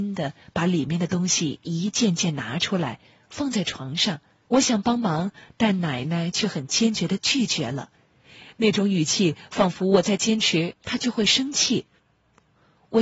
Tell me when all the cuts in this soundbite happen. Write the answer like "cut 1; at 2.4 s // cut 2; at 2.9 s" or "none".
cut 1; at 4.5 s